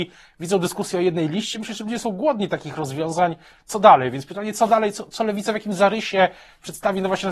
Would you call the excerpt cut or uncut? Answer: uncut